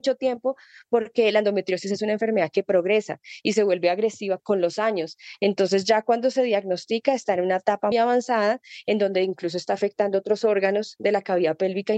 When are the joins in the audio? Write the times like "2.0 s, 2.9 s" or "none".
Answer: 4.4 s, 7.9 s

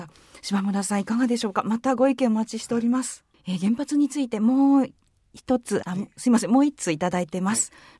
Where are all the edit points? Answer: 3.3 s, 5.8 s

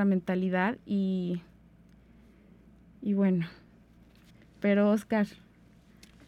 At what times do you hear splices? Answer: none

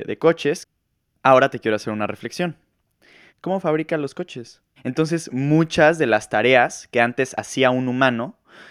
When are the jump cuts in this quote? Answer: 3.3 s, 4.8 s

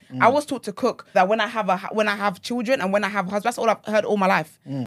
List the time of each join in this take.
1.1 s

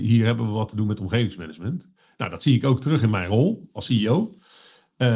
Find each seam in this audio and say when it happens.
none

